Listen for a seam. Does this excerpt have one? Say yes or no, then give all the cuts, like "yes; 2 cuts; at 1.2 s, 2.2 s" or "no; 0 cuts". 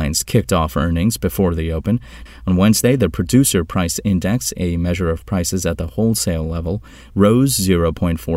yes; 1 cut; at 2.3 s